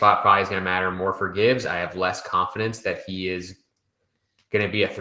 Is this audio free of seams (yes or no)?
yes